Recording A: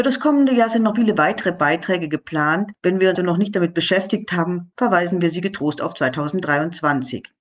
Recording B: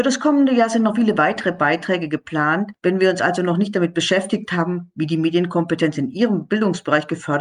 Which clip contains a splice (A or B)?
A